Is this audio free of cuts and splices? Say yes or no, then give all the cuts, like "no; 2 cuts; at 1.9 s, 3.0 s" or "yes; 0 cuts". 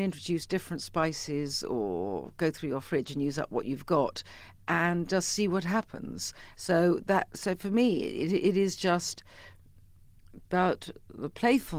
no; 1 cut; at 6.5 s